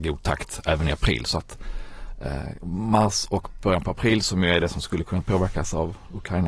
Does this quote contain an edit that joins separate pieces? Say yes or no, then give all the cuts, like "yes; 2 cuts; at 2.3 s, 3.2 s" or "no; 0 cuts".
no; 0 cuts